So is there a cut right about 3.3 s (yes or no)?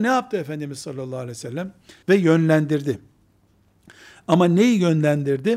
no